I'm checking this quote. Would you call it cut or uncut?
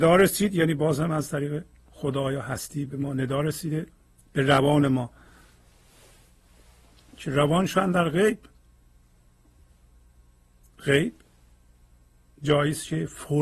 uncut